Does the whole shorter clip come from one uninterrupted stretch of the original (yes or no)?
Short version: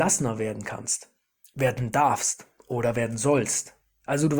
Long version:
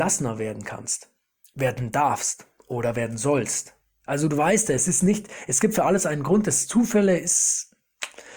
yes